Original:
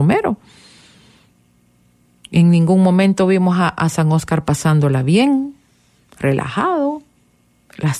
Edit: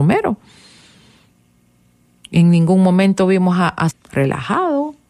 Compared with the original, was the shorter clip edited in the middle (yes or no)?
yes